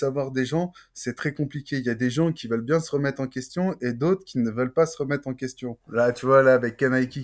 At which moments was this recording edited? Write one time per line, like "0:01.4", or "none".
0:05.8